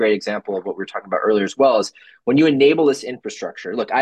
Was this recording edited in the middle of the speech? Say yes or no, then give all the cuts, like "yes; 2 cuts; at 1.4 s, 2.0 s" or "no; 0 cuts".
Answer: no; 0 cuts